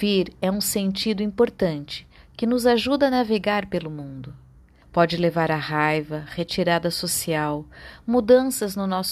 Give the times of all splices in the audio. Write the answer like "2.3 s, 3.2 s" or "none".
4.8 s

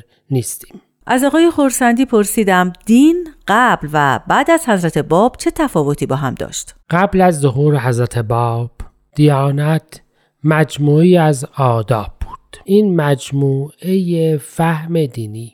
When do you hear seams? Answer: 6.8 s, 12.6 s

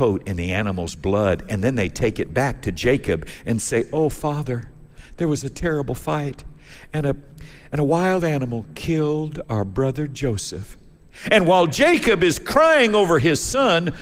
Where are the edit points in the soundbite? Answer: none

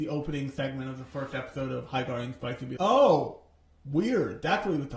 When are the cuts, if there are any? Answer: 2.8 s

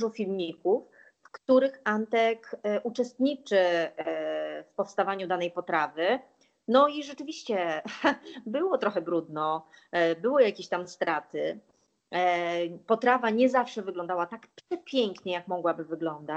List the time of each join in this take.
none

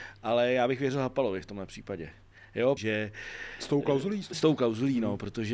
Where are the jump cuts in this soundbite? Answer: 2.8 s

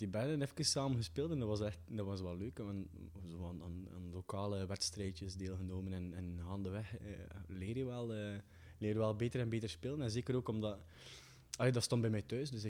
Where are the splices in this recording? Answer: none

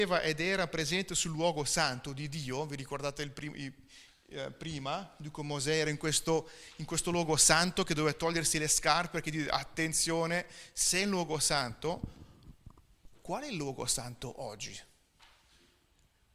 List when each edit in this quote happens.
none

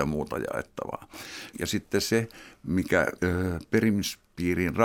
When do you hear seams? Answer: 1.5 s, 3.2 s

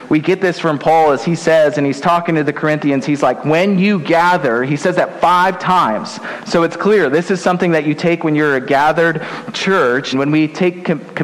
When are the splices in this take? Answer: 10.1 s

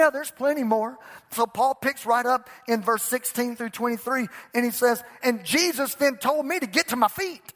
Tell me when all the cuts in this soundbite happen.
5.2 s

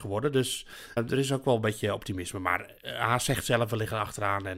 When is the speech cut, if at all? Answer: 1.0 s

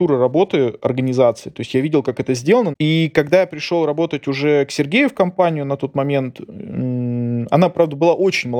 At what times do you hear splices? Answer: 2.7 s

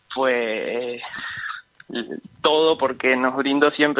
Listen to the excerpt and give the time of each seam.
none

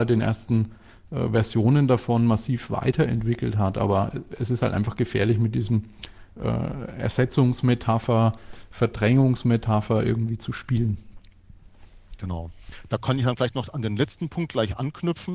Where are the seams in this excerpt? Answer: none

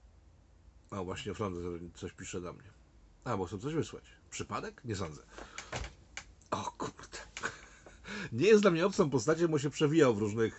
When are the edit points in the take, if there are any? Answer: none

